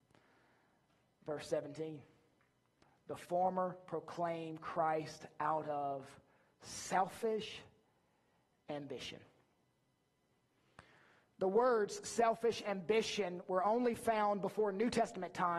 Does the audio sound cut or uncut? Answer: uncut